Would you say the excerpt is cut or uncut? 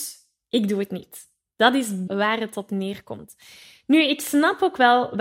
cut